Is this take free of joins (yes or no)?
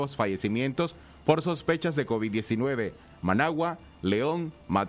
no